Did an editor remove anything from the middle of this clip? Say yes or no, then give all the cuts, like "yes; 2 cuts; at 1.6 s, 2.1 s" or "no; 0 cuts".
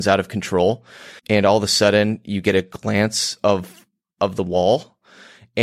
yes; 1 cut; at 1.2 s